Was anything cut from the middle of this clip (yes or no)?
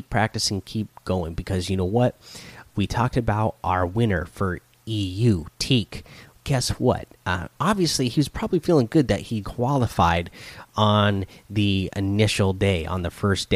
yes